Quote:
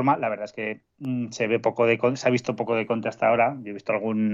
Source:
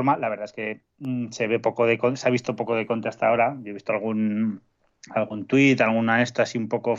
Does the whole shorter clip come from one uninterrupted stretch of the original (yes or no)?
yes